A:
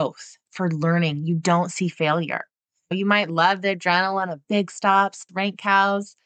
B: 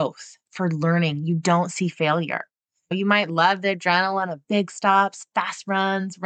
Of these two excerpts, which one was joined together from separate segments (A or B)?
A